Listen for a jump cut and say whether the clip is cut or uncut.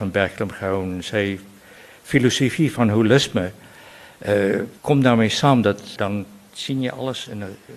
cut